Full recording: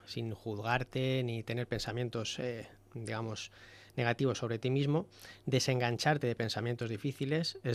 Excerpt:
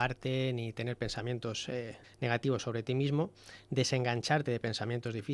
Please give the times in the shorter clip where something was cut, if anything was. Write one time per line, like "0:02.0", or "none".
0:02.0